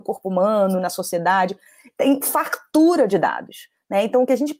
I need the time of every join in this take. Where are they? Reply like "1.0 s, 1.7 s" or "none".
none